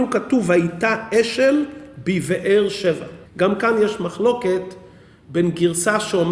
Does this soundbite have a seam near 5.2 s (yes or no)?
no